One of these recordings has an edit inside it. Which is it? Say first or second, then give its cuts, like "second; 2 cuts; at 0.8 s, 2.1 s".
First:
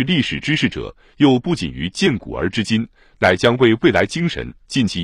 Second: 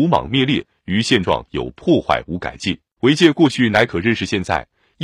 second; 1 cut; at 3.0 s